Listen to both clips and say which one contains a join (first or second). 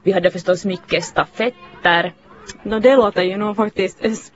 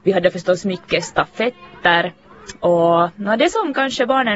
first